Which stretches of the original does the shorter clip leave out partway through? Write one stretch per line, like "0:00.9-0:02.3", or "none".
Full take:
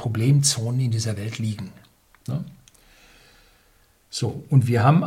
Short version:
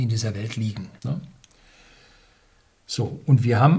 0:01.8-0:02.2